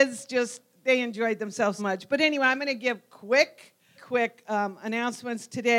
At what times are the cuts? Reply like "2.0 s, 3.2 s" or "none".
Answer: 1.8 s, 3.9 s